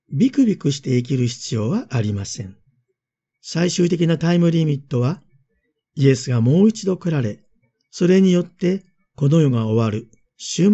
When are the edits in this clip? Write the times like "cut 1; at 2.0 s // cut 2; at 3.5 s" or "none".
cut 1; at 3.3 s